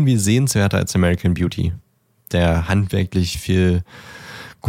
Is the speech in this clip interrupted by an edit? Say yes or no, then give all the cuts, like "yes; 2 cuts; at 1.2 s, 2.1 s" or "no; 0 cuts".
no; 0 cuts